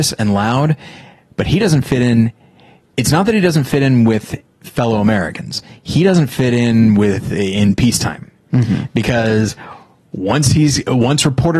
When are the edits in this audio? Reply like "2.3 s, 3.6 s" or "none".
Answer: none